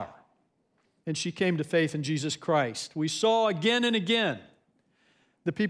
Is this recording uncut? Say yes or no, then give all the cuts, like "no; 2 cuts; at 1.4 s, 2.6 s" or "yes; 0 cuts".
no; 1 cut; at 1.0 s